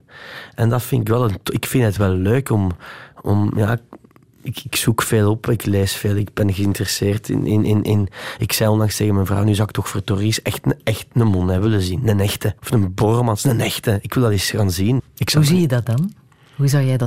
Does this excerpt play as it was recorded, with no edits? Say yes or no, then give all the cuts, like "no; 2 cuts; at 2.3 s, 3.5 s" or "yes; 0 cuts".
no; 2 cuts; at 12.6 s, 15.0 s